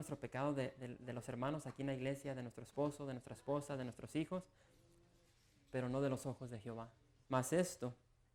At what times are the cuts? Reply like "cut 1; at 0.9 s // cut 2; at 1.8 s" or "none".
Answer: cut 1; at 7.2 s